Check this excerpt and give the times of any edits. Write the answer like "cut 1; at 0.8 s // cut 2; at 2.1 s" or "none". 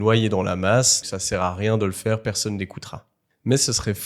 cut 1; at 1.0 s